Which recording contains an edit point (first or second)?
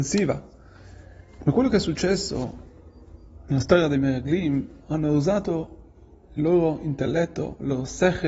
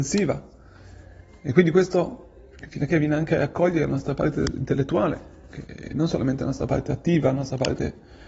first